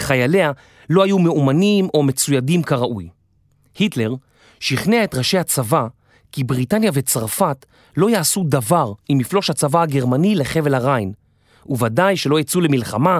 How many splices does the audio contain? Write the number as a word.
zero